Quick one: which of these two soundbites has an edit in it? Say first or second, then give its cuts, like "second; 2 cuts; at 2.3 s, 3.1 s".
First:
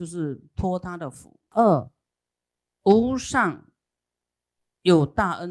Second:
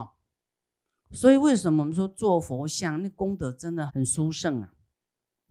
second; 1 cut; at 3.9 s